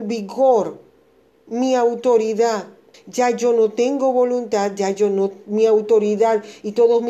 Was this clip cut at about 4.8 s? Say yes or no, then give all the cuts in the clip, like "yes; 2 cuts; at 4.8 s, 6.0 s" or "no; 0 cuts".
no; 1 cut; at 2.9 s